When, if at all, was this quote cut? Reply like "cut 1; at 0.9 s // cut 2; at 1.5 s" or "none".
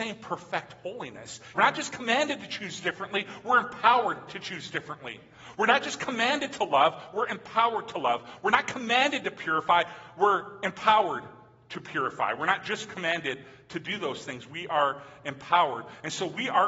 cut 1; at 1.5 s